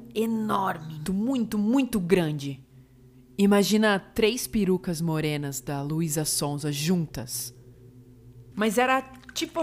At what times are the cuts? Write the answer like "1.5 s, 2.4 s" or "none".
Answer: 1.1 s, 8.5 s